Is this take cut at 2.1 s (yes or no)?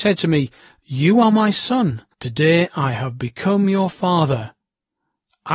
yes